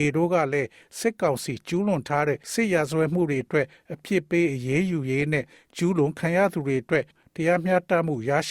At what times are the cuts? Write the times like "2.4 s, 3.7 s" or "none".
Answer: 2.4 s